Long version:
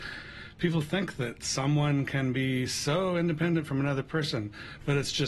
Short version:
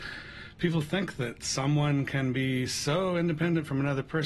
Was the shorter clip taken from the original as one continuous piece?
yes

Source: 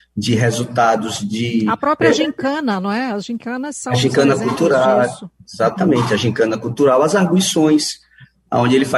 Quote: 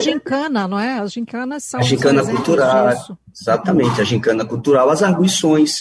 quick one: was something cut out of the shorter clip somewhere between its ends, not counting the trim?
no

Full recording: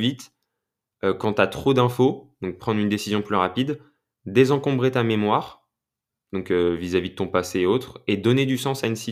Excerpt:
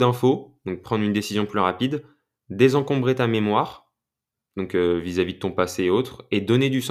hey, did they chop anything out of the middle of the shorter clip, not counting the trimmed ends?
no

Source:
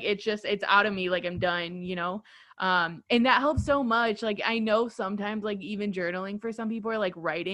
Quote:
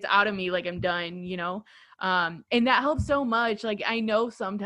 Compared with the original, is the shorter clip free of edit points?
yes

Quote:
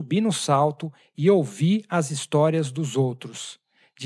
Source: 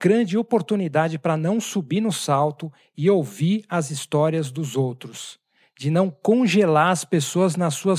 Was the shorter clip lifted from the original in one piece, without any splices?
yes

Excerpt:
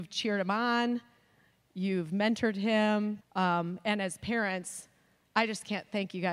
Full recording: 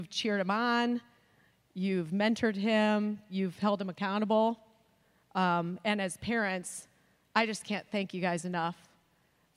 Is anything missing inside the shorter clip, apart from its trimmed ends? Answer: yes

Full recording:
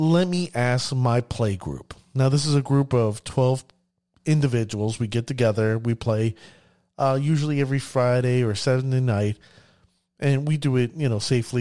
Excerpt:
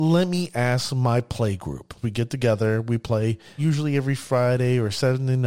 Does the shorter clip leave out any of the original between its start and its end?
yes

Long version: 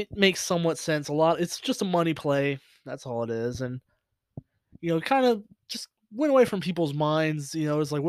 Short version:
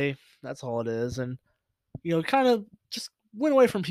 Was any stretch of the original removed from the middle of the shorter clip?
yes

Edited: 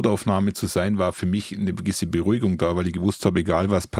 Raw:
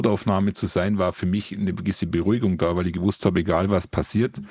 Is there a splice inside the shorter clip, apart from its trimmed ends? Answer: no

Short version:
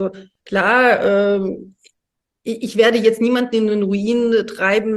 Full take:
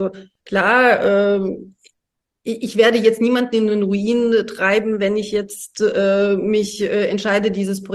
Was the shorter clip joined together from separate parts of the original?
no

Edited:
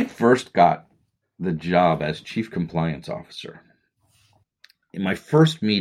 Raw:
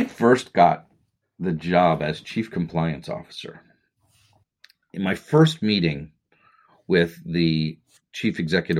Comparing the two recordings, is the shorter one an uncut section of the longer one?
yes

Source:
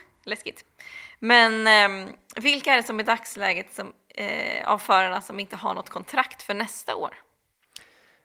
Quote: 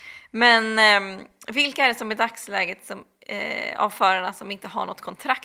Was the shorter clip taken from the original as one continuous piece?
yes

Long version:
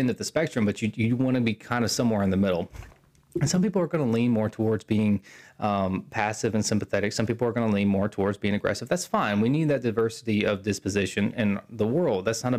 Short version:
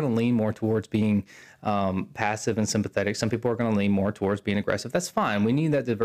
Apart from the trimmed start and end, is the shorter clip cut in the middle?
no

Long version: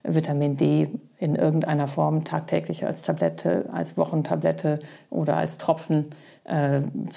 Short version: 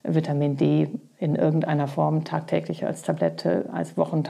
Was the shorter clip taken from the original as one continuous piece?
yes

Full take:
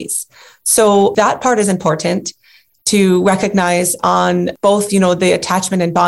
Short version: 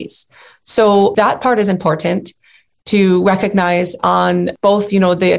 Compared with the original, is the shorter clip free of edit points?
yes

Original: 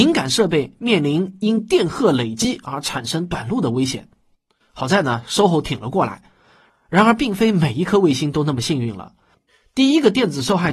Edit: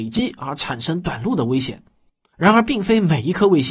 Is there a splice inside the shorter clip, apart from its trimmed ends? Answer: yes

